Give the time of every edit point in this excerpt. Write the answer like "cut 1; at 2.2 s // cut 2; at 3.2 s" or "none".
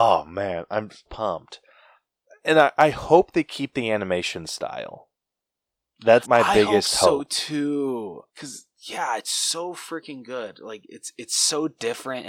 cut 1; at 1.1 s // cut 2; at 6.2 s // cut 3; at 8.3 s

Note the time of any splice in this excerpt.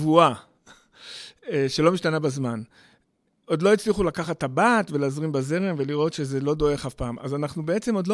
none

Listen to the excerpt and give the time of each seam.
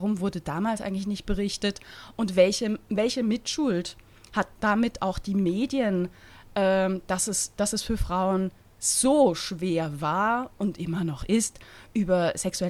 cut 1; at 4.5 s

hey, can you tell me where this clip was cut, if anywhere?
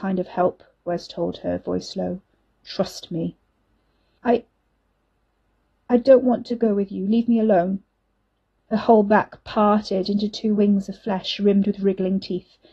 cut 1; at 4.2 s // cut 2; at 8.6 s

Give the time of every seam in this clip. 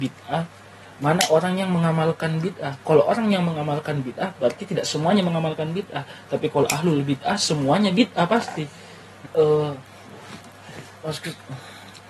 cut 1; at 9.2 s

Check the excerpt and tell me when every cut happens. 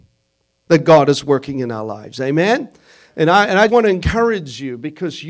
cut 1; at 3.7 s

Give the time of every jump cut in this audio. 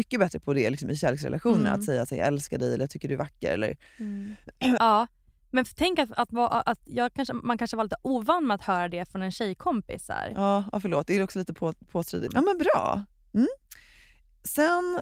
cut 1; at 4.8 s // cut 2; at 12.3 s

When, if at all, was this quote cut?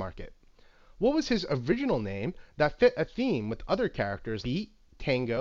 cut 1; at 4.4 s

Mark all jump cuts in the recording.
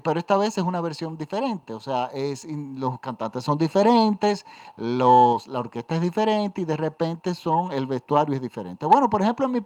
none

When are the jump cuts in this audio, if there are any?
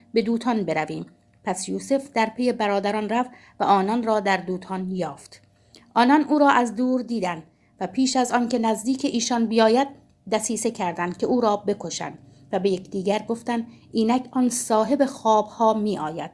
none

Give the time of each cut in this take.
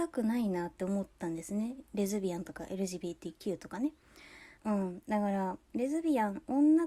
cut 1; at 4.6 s // cut 2; at 5.6 s

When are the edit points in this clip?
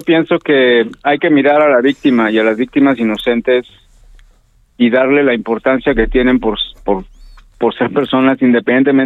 none

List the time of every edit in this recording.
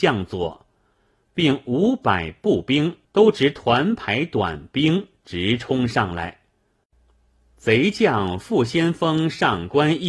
cut 1; at 3.0 s

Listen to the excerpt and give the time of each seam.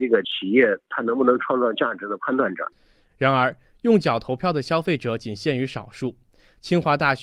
none

